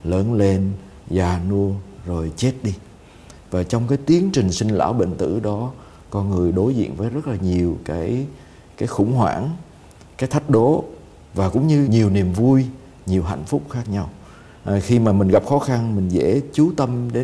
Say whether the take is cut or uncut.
cut